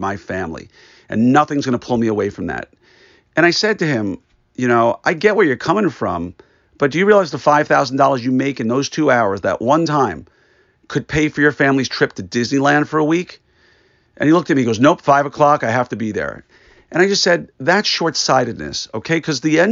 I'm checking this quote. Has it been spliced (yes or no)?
no